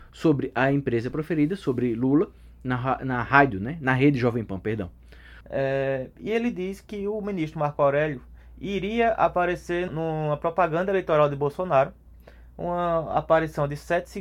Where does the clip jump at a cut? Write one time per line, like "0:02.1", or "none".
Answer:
0:05.4
0:09.9